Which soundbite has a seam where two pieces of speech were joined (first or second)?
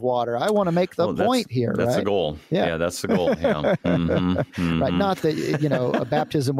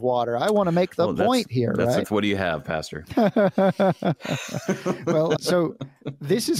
second